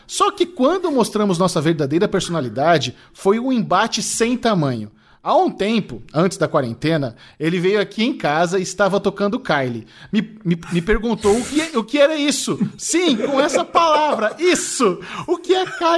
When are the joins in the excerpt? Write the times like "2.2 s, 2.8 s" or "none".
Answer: none